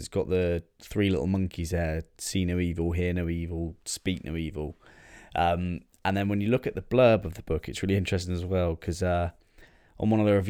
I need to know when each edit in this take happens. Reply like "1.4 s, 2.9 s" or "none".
none